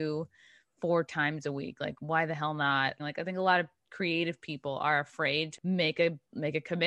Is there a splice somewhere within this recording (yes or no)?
yes